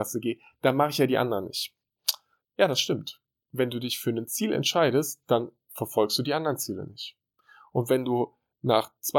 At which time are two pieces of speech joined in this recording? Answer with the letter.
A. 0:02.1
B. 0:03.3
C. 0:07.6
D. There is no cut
D